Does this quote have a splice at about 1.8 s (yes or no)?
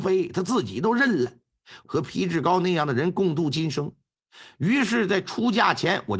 yes